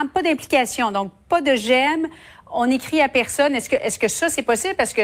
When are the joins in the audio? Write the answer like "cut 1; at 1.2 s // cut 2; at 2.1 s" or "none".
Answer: none